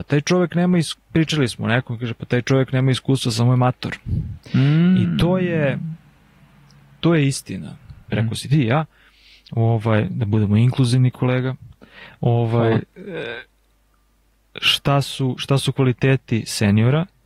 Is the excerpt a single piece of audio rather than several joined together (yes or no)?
no